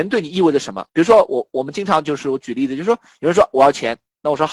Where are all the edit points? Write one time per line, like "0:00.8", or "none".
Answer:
none